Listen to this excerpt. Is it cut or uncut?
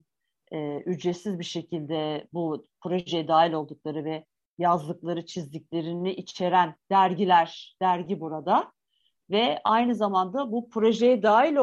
uncut